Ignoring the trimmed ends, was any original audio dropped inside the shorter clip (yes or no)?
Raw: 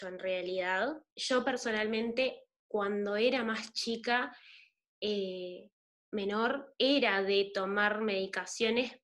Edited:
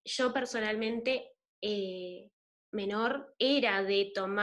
yes